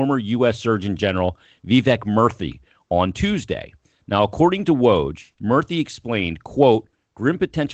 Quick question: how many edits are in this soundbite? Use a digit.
1